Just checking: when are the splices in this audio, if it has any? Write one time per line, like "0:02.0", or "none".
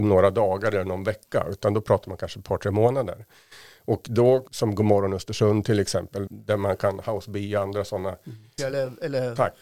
0:04.5
0:06.3
0:08.6